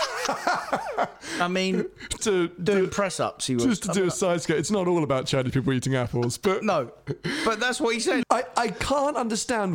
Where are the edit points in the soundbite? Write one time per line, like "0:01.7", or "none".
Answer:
0:02.2
0:08.2